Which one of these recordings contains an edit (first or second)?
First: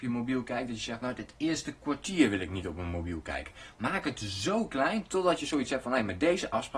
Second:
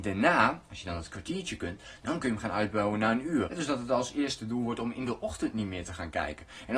second